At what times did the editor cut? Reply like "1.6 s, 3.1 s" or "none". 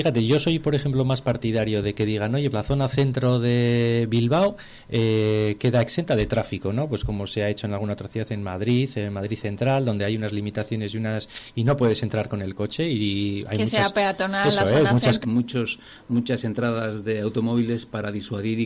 2.5 s, 15.2 s